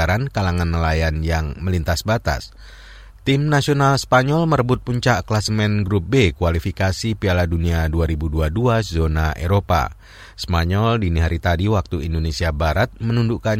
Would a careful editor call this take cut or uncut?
cut